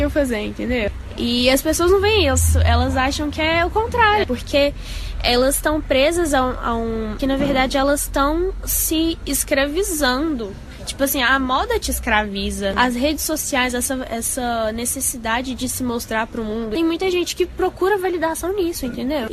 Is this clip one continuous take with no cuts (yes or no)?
no